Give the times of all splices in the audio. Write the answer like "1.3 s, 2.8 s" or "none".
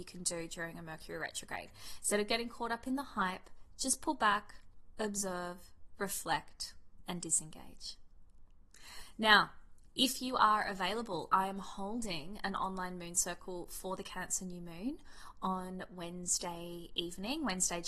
none